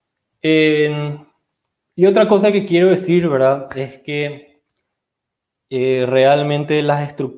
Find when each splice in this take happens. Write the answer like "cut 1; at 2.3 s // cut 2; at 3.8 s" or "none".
none